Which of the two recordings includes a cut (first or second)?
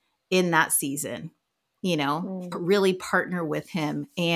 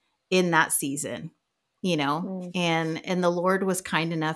first